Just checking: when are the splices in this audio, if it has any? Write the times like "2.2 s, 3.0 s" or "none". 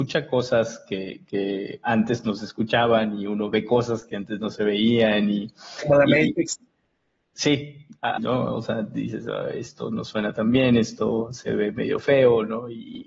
8.2 s